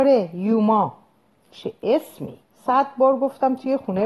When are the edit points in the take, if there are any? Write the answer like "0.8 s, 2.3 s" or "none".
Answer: 2.4 s